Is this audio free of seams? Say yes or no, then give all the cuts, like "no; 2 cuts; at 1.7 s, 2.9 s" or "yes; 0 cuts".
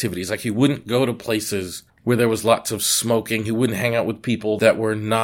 yes; 0 cuts